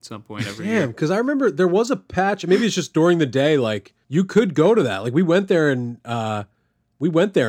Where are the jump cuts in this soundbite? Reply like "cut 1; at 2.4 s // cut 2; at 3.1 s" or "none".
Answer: cut 1; at 4.0 s